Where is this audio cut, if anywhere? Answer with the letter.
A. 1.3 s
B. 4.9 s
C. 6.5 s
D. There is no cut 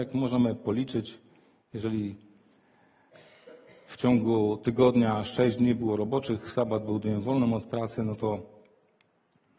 D